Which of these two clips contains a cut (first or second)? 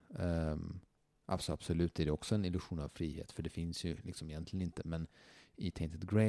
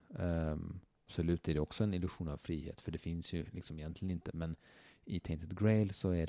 second